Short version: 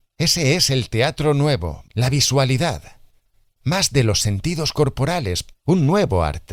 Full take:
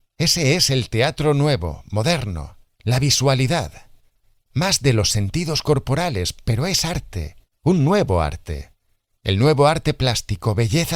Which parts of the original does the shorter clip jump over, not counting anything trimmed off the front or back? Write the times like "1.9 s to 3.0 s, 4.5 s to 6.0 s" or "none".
1.8 s to 2.7 s, 6.4 s to 7.5 s